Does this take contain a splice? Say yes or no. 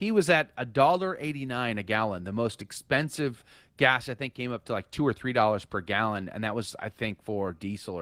no